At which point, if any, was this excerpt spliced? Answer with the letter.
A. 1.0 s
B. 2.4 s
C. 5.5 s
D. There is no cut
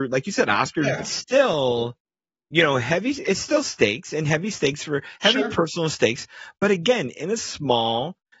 A